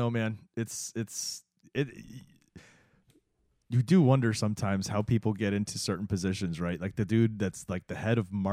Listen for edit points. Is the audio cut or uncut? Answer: uncut